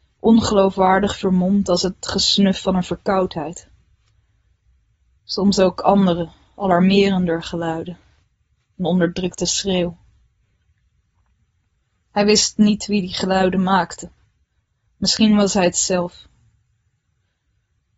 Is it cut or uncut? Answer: uncut